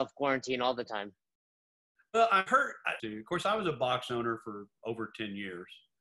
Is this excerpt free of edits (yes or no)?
no